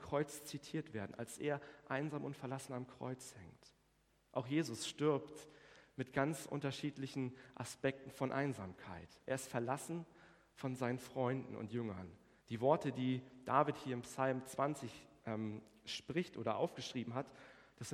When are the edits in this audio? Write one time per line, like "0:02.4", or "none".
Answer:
0:12.4